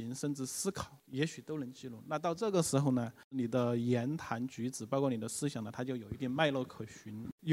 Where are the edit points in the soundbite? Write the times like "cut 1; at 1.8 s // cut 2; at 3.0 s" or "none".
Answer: cut 1; at 1.0 s